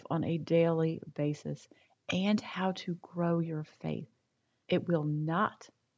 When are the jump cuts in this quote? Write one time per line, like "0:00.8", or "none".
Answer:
0:04.6